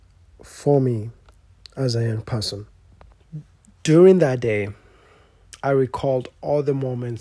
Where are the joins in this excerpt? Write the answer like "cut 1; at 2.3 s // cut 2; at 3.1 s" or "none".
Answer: none